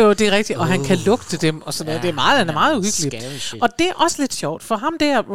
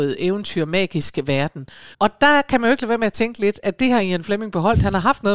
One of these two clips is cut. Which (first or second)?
second